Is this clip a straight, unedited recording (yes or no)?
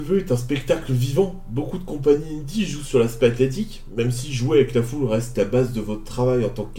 yes